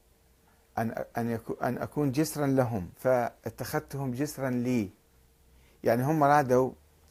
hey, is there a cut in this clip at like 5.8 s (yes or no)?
no